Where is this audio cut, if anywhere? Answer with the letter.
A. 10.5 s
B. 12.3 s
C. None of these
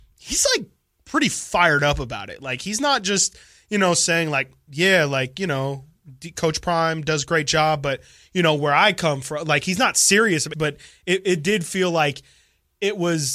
A